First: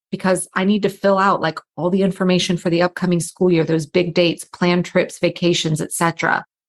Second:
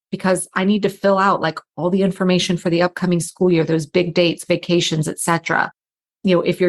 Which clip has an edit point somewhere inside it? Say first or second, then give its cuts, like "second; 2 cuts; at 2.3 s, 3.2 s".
second; 1 cut; at 4.5 s